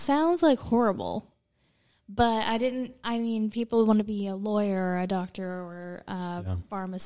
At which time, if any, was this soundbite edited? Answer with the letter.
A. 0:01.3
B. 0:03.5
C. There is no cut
C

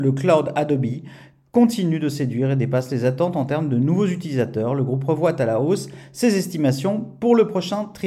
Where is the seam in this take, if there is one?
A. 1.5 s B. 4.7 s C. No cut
C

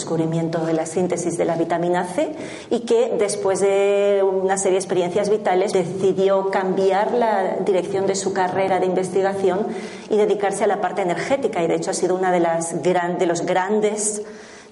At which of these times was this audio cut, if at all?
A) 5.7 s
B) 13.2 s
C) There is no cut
A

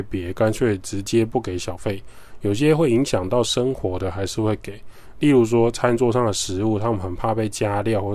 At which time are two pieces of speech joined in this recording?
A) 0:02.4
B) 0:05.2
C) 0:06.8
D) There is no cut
D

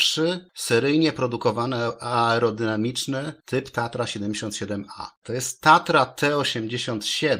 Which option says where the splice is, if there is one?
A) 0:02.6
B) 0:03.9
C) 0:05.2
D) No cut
C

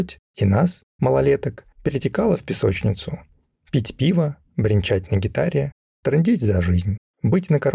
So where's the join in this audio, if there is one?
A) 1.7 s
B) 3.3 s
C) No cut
A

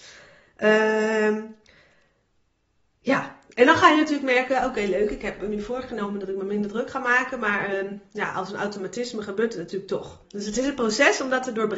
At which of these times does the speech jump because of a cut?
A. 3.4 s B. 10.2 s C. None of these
B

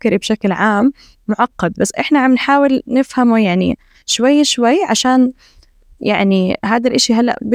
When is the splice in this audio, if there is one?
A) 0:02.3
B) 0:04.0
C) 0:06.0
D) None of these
D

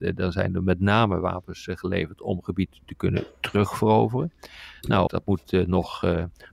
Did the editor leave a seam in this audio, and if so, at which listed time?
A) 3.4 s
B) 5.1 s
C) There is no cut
B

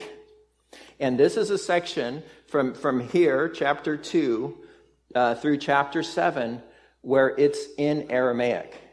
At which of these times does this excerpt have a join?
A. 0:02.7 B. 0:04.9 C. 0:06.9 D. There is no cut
D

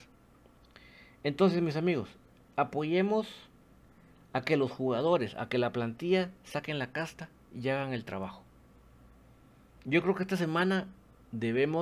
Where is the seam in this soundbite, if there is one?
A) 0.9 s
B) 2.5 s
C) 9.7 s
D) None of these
D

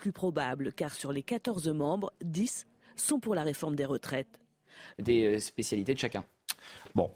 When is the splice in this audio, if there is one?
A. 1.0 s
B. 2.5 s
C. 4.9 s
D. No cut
C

